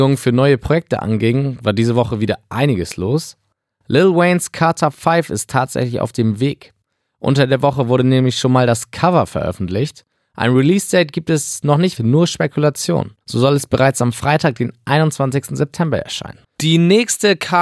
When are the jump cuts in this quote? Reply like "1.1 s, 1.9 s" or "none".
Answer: 12.0 s, 13.2 s, 16.4 s